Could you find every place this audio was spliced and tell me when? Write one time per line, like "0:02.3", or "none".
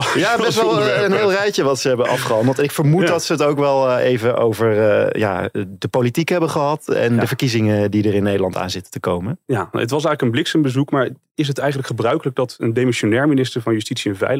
none